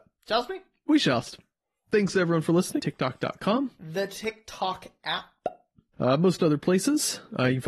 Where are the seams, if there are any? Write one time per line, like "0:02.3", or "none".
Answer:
0:02.8
0:05.9

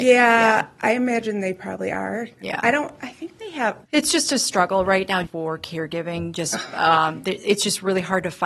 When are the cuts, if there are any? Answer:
0:03.8
0:05.2

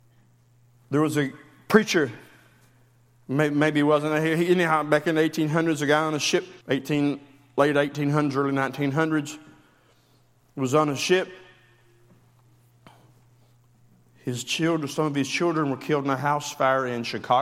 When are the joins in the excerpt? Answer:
0:06.6

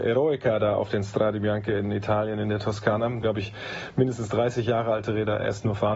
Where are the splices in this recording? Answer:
0:03.2

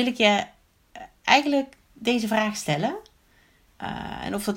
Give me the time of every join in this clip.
0:03.7

